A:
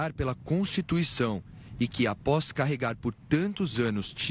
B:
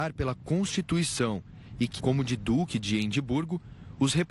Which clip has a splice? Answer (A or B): B